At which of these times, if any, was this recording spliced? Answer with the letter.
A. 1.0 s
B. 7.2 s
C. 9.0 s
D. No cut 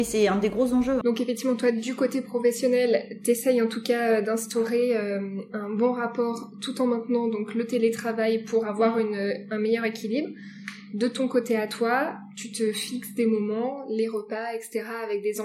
A